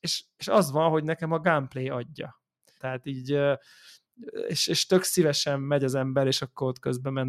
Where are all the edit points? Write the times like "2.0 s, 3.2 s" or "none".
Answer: 2.8 s